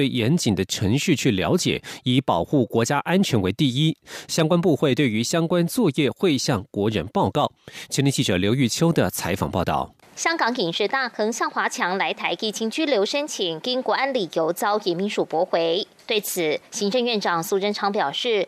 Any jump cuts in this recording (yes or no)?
no